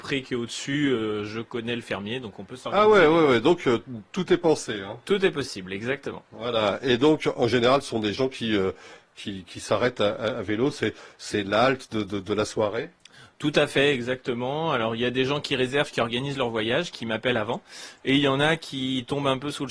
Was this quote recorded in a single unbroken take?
yes; 0 cuts

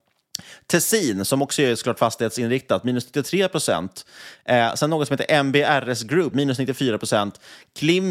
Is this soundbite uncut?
no; 1 cut; at 6.3 s

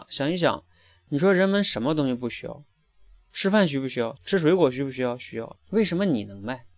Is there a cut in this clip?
yes; 2 cuts; at 4.2 s, 5.6 s

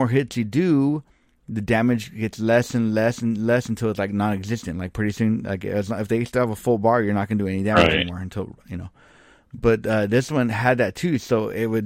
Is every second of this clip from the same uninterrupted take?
yes; 0 cuts

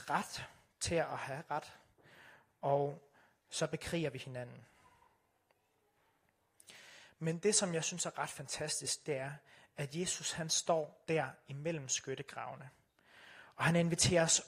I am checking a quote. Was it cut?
no; 0 cuts

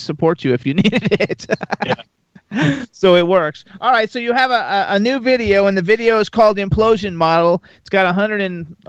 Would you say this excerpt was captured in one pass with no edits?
yes; 0 cuts

